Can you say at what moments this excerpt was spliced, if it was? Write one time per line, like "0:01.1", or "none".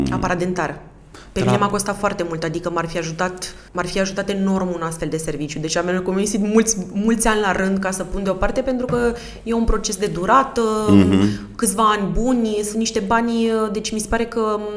0:03.7